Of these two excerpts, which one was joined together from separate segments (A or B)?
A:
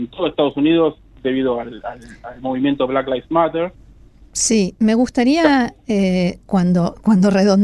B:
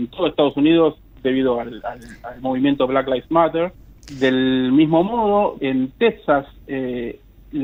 B